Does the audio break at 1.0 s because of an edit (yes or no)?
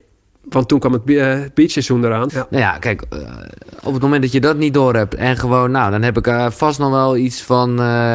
no